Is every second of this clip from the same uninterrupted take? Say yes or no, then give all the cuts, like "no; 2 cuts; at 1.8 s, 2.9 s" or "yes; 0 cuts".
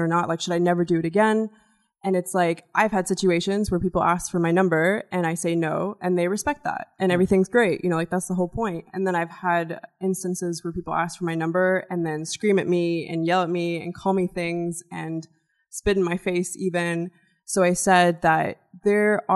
yes; 0 cuts